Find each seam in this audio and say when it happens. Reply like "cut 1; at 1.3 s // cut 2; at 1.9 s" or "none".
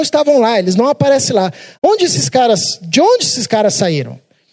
cut 1; at 1.7 s